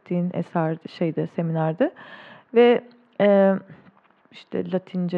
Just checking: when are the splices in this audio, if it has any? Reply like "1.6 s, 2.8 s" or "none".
4.2 s